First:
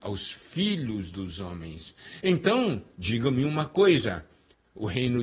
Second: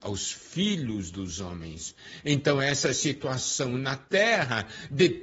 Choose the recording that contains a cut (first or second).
first